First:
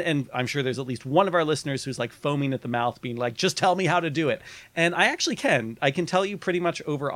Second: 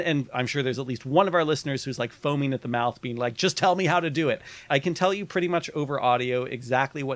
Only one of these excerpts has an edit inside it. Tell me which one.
second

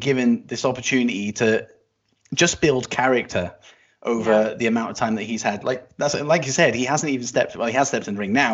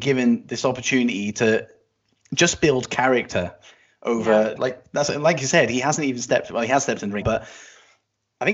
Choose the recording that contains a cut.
second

